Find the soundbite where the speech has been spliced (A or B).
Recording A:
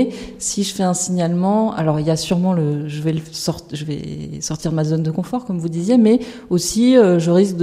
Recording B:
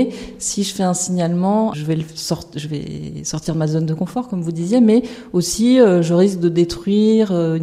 B